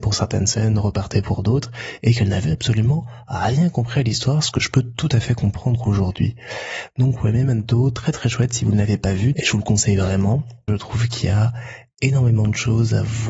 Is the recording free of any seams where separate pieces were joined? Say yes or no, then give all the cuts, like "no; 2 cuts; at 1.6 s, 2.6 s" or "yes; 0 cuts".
no; 2 cuts; at 9.3 s, 10.7 s